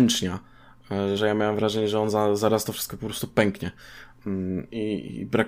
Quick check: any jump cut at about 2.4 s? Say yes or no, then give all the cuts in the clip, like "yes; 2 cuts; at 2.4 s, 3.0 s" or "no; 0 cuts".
no; 1 cut; at 1.2 s